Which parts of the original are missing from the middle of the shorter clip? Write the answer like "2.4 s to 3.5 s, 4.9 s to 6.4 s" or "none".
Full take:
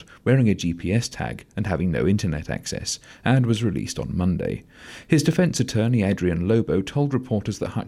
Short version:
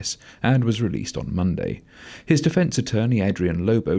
none